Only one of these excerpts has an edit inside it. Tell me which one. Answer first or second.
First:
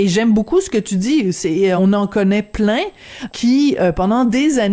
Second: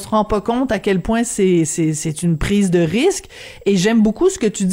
first